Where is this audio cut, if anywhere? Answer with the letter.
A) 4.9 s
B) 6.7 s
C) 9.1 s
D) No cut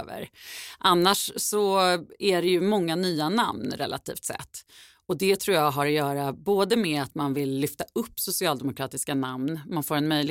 D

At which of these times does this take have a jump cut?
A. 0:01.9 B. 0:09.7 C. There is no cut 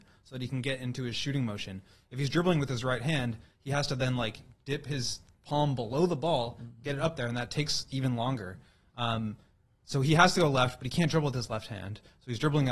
C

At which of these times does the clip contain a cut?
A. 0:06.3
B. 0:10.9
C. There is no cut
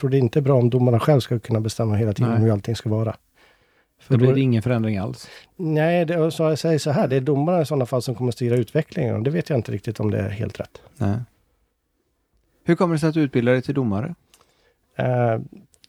C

